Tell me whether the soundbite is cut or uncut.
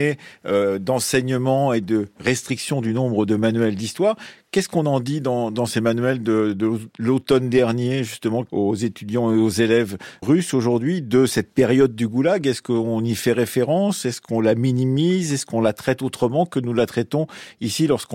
cut